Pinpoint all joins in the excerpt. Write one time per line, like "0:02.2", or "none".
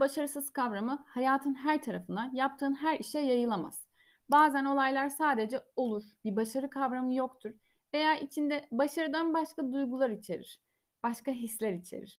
0:06.2